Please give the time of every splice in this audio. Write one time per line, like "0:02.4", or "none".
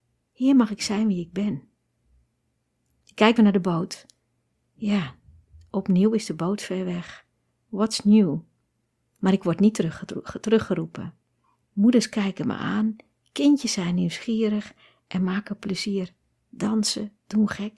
0:03.4
0:11.6